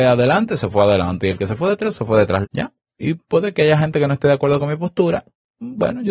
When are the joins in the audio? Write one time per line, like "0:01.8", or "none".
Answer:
0:02.4